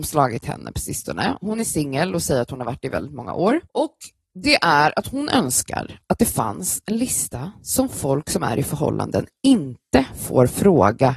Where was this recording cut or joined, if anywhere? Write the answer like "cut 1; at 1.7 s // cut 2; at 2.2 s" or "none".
cut 1; at 3.6 s

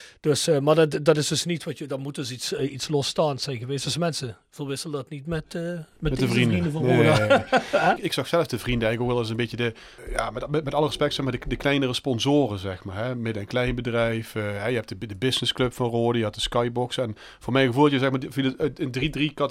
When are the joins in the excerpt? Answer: none

